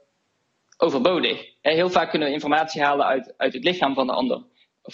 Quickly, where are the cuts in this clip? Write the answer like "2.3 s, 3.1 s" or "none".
none